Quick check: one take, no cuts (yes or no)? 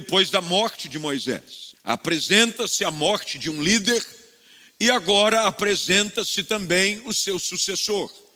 no